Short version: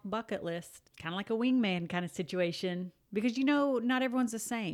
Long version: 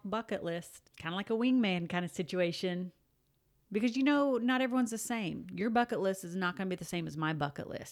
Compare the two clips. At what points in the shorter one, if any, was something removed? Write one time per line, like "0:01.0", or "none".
0:03.0

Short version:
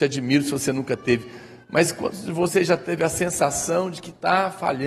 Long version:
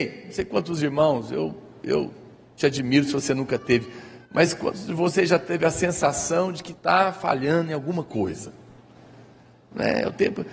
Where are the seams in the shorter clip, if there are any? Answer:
none

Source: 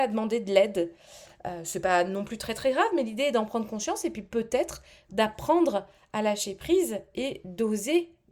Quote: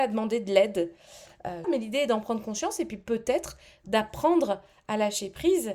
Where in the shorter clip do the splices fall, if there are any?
0:01.6

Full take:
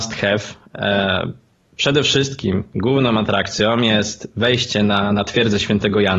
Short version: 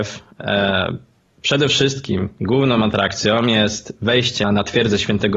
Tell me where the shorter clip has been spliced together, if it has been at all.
0:04.4

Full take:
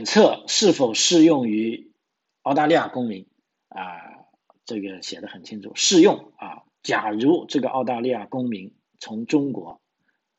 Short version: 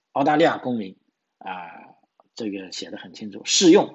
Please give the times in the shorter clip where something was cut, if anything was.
none

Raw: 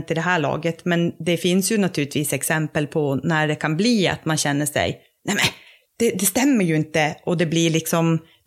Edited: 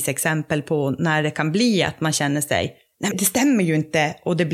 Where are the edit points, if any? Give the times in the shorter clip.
0:03.1

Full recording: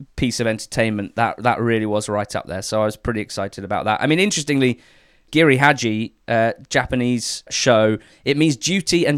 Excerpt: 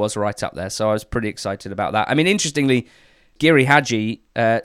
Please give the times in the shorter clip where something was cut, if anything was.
none

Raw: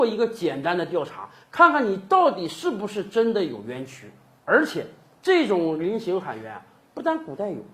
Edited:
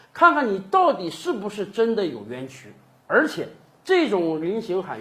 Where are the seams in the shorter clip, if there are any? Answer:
none

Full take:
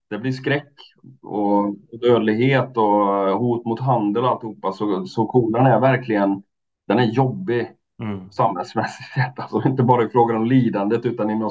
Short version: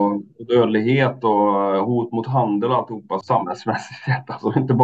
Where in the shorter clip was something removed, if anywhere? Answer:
0:03.2

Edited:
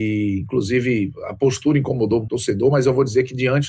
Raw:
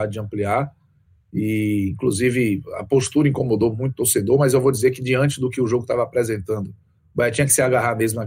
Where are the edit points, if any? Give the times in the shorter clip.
0:02.3

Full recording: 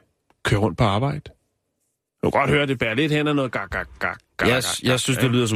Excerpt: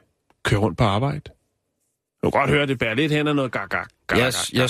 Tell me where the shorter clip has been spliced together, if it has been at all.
0:03.7

